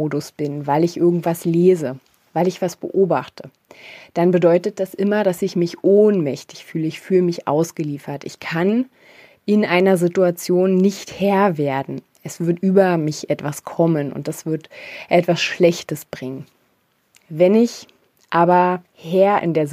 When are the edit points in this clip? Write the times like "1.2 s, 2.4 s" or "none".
none